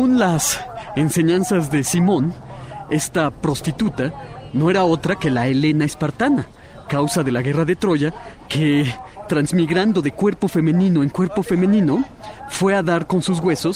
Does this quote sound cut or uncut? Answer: uncut